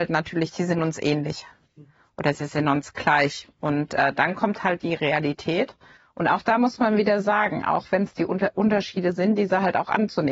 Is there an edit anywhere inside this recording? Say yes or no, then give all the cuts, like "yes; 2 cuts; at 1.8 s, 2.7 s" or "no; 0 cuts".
no; 0 cuts